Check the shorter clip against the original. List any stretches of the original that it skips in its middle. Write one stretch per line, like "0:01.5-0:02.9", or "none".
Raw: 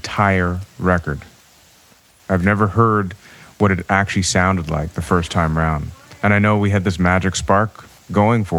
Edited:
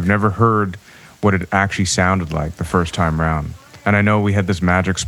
none